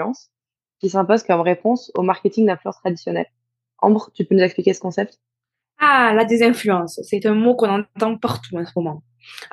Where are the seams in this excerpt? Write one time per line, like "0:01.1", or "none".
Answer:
none